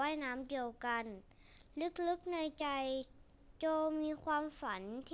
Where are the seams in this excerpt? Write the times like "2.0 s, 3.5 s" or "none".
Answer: none